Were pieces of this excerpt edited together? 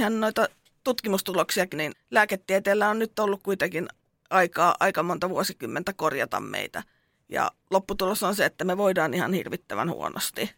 yes; 1 cut; at 1.7 s

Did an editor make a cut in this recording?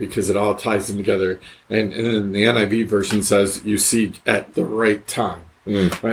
yes; 1 cut; at 4.5 s

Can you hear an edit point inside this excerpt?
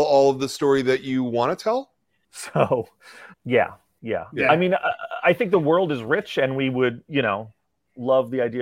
yes; 2 cuts; at 2.2 s, 3.3 s

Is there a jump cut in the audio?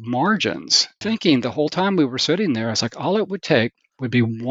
yes; 1 cut; at 1.0 s

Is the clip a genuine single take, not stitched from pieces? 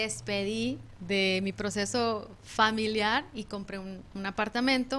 yes; 0 cuts

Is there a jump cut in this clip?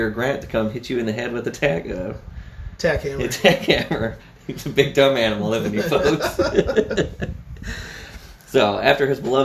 yes; 1 cut; at 4.2 s

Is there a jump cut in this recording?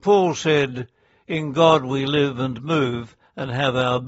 no; 0 cuts

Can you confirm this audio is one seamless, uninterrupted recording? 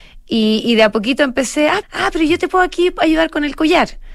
no; 1 cut; at 1.8 s

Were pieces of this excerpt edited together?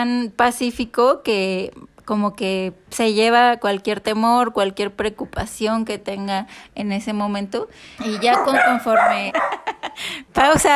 yes; 2 cuts; at 8.0 s, 9.3 s

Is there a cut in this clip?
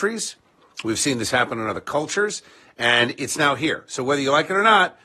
no; 0 cuts

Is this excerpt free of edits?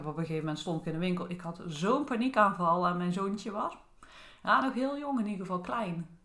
yes; 0 cuts

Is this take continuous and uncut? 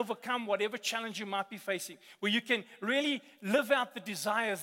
yes; 0 cuts

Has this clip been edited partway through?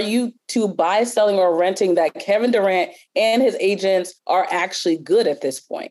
no; 0 cuts

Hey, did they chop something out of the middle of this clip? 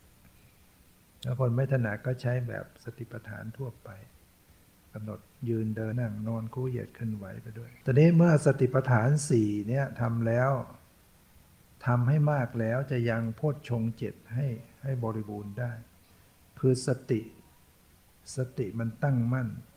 yes; 2 cuts; at 5.9 s, 7.8 s

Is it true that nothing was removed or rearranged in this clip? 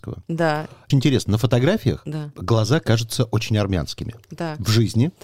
no; 1 cut; at 0.9 s

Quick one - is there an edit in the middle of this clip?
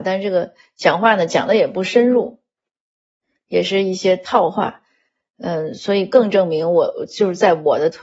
no; 0 cuts

